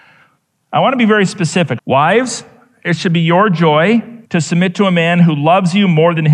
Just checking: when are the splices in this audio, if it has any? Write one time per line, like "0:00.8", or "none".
0:01.8
0:04.2